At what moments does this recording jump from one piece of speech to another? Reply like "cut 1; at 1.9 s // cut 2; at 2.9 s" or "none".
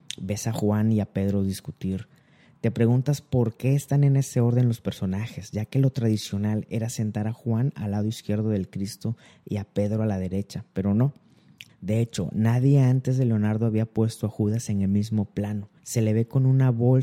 cut 1; at 11.7 s // cut 2; at 15.8 s

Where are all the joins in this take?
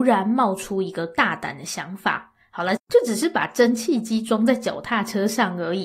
cut 1; at 2.8 s

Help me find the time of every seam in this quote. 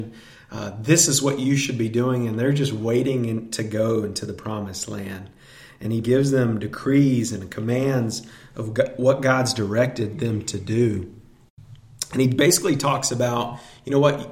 cut 1; at 6.0 s

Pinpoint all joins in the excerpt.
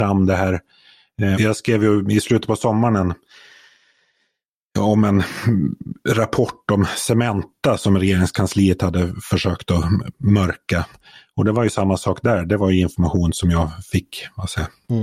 cut 1; at 1.3 s

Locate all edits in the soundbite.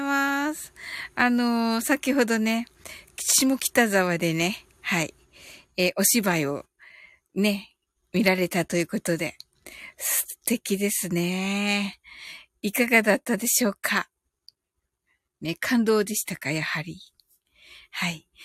none

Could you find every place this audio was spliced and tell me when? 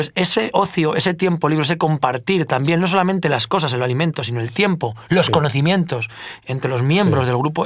none

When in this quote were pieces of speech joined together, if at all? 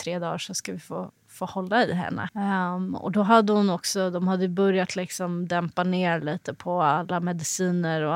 cut 1; at 2.3 s

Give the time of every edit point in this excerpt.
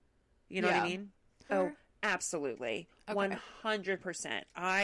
cut 1; at 1.5 s

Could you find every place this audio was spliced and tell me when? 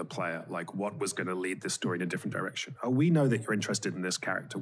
none

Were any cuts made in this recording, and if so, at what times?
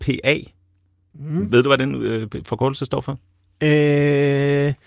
none

